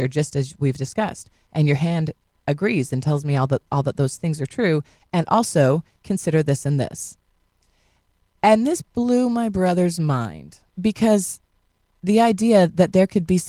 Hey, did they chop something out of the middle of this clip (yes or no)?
yes